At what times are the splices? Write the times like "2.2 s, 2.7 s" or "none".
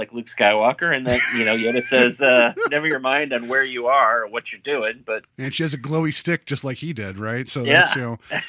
none